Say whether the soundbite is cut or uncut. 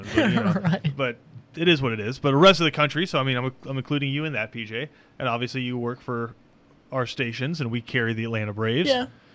uncut